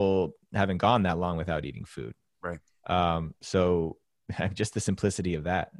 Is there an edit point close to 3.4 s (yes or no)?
no